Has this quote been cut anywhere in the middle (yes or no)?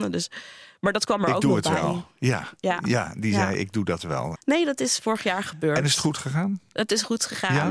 yes